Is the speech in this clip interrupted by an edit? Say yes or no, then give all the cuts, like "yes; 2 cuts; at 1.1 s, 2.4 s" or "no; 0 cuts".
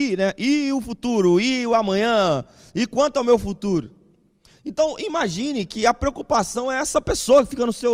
no; 0 cuts